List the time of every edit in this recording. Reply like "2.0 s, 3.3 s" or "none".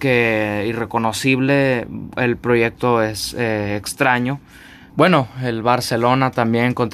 4.9 s